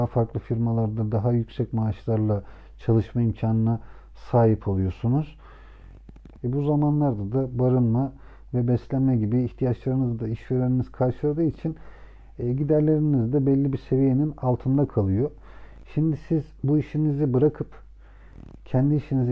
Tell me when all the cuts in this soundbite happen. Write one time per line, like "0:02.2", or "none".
0:06.4